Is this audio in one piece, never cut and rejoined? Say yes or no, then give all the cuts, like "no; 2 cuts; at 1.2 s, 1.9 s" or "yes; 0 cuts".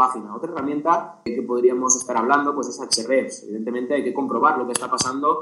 yes; 0 cuts